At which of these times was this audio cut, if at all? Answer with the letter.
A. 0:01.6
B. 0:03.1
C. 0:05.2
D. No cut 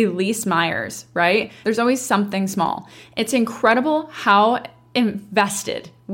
A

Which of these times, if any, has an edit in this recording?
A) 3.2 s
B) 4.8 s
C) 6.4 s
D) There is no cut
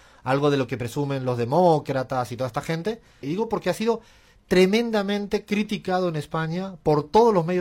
A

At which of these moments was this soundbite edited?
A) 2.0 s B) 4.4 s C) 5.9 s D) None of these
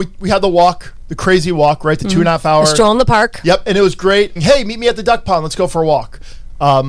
B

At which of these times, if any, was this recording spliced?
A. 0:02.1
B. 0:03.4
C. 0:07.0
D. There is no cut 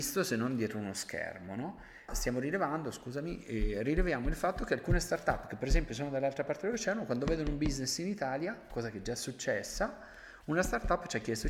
A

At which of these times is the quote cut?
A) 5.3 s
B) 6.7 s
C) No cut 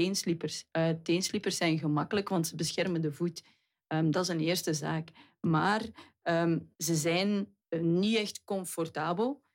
B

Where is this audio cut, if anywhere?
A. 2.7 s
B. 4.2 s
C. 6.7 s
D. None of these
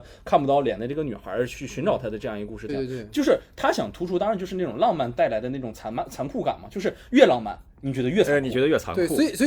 A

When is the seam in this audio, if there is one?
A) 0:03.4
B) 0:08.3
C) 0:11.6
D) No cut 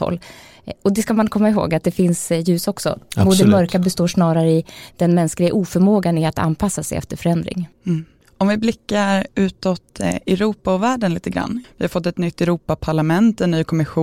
C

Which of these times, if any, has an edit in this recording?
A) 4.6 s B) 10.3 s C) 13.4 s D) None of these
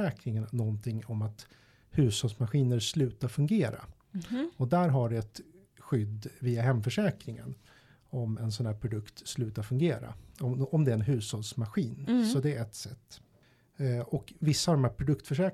D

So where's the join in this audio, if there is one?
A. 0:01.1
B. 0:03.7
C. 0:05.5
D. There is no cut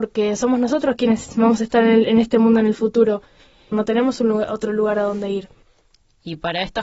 B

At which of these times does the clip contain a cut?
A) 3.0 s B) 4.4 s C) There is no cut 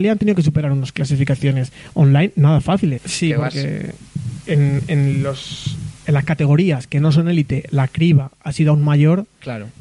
A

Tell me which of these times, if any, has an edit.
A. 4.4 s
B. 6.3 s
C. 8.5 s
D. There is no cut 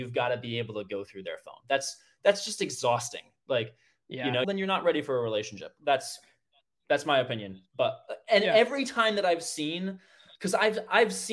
A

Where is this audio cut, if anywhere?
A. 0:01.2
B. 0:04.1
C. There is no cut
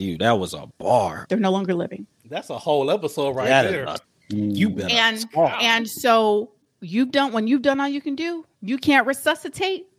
A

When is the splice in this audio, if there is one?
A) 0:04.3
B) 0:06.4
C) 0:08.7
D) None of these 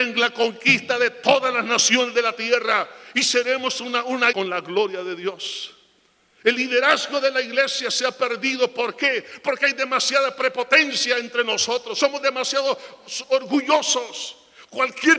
A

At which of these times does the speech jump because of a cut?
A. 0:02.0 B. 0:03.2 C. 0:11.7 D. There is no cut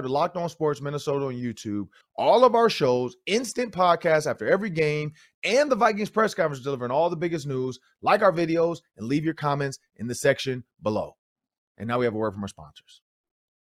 A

